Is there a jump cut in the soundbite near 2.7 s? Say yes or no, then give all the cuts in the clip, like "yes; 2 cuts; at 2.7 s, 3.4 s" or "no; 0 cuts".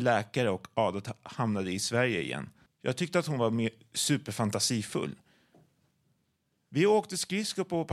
yes; 1 cut; at 2.7 s